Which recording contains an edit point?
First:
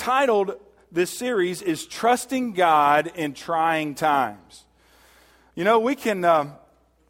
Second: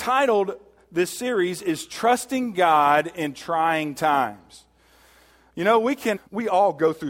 second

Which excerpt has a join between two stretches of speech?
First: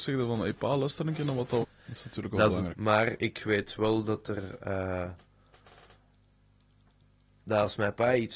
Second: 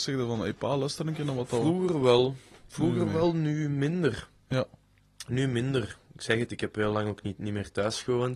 first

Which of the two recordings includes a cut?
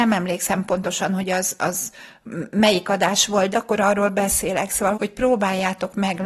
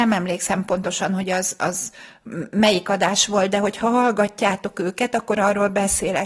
first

